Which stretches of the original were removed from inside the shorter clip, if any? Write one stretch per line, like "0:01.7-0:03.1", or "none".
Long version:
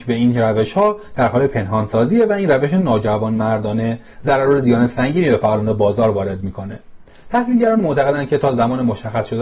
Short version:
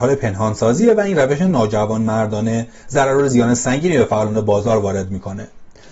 none

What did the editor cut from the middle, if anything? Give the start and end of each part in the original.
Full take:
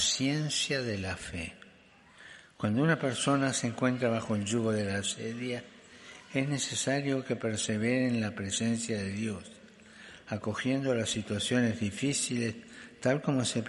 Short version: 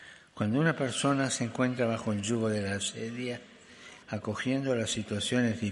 0:06.3-0:10.2

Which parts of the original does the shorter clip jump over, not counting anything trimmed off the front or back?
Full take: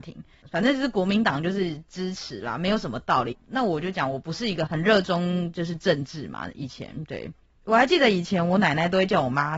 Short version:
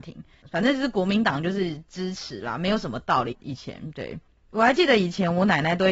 0:03.4-0:06.5

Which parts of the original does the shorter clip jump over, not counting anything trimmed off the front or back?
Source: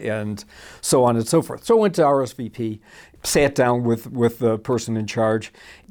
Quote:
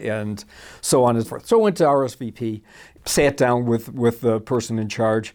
0:01.2-0:01.4

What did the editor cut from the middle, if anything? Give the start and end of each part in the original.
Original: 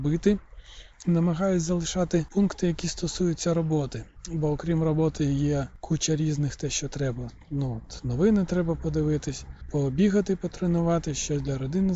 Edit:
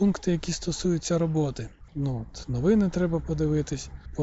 0:04.2-0:07.4

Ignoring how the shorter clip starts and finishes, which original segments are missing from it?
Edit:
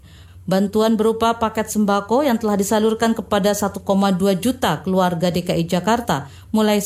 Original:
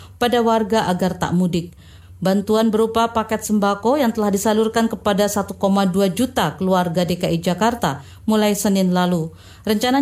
none

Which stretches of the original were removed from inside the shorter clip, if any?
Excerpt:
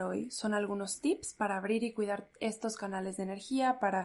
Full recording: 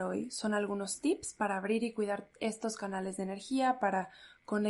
none

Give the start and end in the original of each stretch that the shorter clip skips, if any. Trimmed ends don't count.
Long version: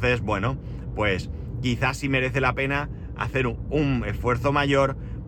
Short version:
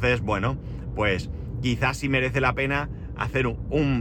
none

